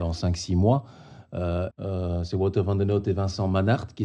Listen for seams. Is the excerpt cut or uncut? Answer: cut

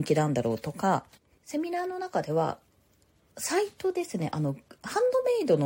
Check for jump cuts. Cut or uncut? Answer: uncut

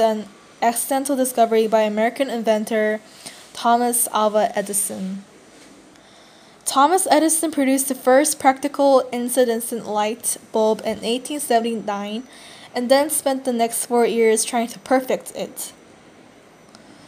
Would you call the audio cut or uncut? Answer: uncut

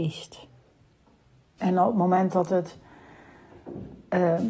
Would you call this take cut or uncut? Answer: cut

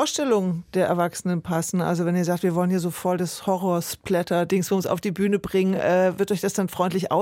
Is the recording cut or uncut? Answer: uncut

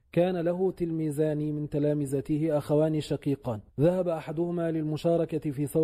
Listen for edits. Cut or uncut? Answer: cut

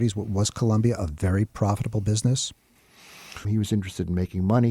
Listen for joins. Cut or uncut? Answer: cut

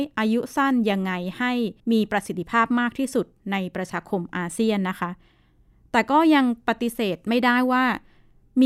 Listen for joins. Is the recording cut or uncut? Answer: cut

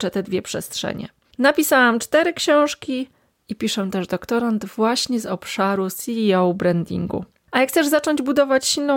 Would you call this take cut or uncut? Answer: uncut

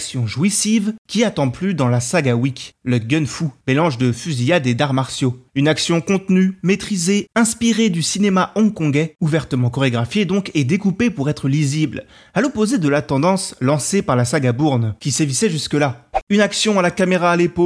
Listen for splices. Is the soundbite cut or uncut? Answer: uncut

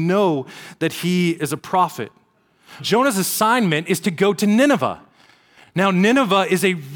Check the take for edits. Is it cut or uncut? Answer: cut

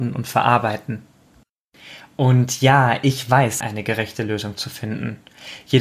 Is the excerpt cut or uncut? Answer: cut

